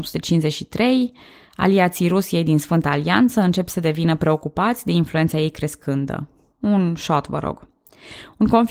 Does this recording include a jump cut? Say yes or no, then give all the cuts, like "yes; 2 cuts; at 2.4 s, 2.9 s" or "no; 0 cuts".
no; 0 cuts